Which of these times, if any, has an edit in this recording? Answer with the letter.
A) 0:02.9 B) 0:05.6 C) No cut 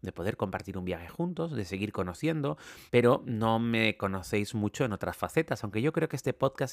A